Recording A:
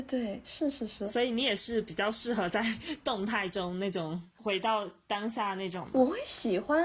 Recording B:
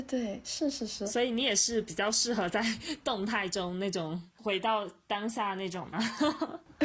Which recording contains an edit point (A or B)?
B